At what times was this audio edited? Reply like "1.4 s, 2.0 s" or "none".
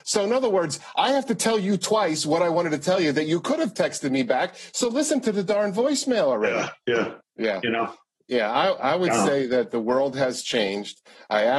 7.2 s